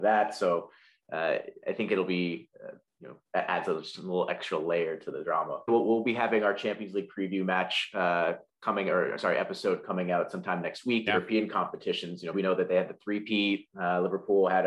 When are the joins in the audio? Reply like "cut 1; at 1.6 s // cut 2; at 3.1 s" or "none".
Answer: cut 1; at 5.7 s // cut 2; at 11.1 s // cut 3; at 12.3 s